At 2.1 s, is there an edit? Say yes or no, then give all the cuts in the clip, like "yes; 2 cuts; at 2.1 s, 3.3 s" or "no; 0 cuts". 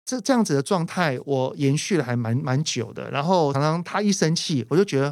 no; 1 cut; at 3.5 s